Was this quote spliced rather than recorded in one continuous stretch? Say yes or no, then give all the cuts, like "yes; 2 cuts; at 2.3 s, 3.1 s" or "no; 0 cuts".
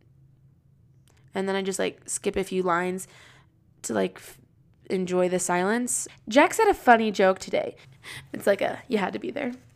yes; 2 cuts; at 6.1 s, 7.8 s